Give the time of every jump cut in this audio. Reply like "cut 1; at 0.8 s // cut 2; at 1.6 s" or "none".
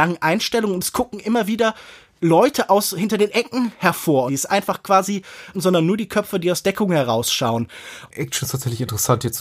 cut 1; at 4.3 s // cut 2; at 5.5 s // cut 3; at 8.1 s